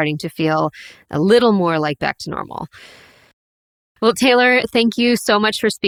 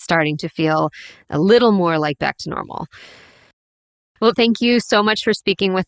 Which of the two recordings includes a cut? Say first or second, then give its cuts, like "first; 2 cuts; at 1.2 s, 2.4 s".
second; 1 cut; at 4.3 s